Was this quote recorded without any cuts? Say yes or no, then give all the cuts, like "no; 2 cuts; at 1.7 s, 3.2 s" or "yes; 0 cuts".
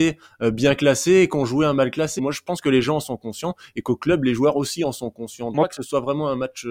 no; 2 cuts; at 2.2 s, 5.5 s